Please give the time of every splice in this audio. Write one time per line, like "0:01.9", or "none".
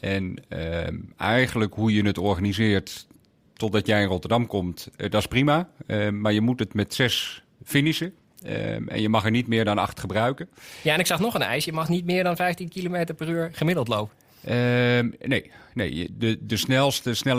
none